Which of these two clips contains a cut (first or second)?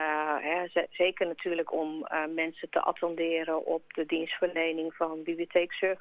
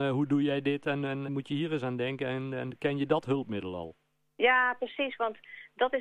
second